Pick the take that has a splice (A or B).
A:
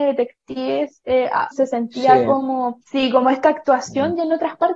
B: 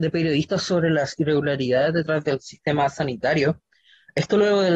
A